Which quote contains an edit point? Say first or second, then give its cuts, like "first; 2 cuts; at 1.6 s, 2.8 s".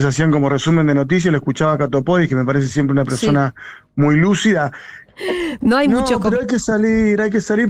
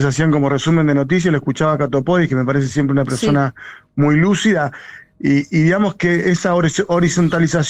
first; 1 cut; at 5.0 s